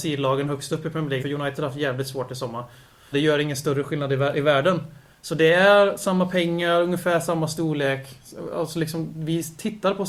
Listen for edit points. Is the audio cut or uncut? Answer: cut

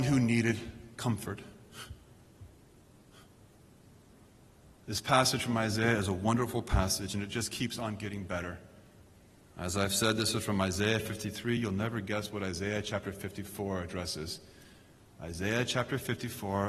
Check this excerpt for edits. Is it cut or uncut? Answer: uncut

